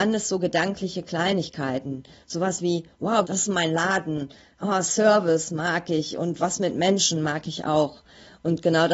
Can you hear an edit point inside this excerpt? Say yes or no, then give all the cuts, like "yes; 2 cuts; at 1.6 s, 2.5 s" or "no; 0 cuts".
yes; 1 cut; at 3.2 s